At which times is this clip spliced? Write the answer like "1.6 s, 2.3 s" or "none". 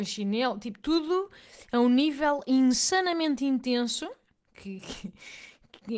4.5 s